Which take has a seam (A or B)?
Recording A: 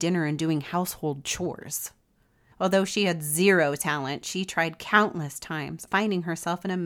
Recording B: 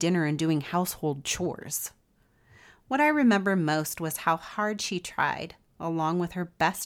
A